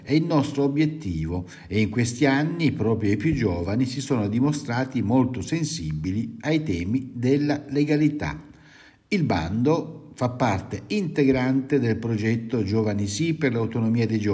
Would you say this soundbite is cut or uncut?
uncut